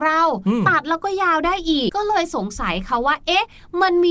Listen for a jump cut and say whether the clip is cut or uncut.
cut